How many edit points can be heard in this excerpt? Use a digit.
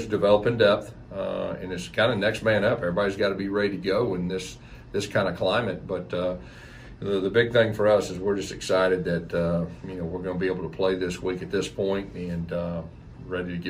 0